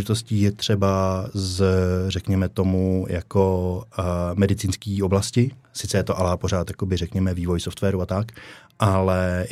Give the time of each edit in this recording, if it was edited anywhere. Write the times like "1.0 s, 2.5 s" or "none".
none